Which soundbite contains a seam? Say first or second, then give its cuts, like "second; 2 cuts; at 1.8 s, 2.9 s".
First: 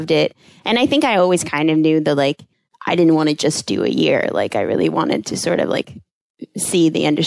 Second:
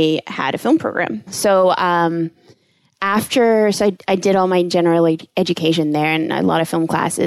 second; 1 cut; at 1.3 s